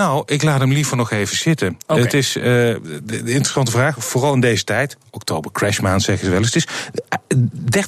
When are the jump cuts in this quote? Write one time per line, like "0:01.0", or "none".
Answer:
none